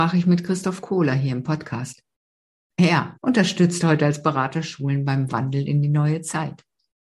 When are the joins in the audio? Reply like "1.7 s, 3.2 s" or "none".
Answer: 3.2 s